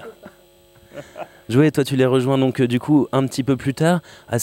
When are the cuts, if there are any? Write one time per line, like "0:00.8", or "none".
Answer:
none